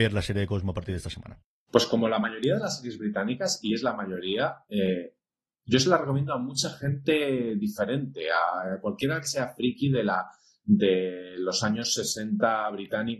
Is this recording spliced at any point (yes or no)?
no